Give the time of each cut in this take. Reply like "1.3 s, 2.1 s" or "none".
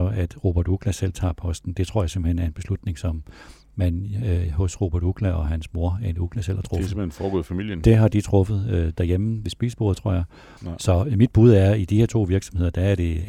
10.6 s

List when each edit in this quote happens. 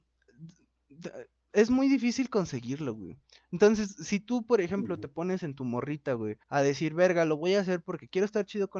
6.4 s

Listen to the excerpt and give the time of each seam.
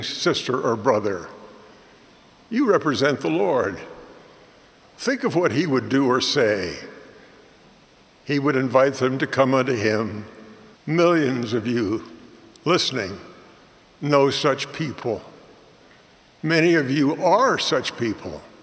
10.8 s

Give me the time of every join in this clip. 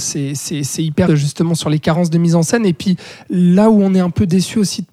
1.1 s

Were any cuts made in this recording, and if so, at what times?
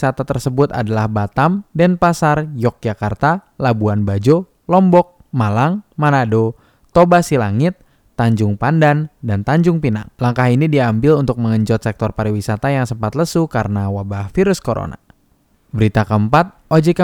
none

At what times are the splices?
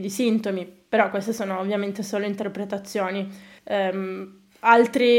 3.6 s

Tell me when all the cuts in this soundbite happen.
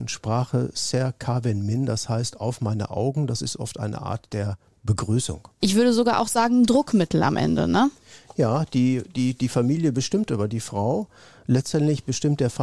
5.6 s

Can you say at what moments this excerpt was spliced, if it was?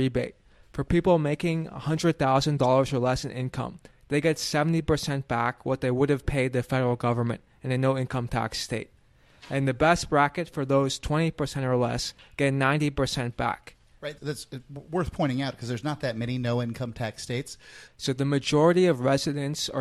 14.2 s, 17.9 s

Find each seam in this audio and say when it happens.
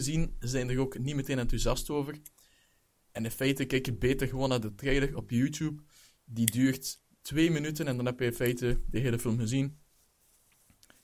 none

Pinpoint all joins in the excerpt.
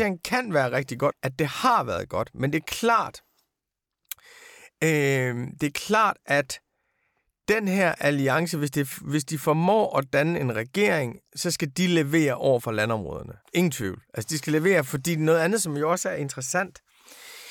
1.1 s, 13.4 s

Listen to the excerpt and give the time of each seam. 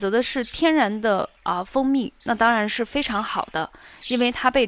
none

